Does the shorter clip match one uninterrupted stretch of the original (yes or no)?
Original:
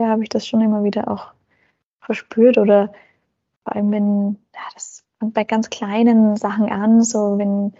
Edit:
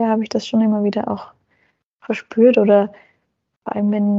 yes